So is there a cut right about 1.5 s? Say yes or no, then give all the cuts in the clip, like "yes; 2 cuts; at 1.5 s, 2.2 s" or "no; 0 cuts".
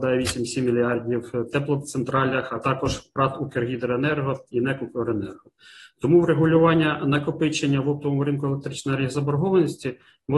no; 0 cuts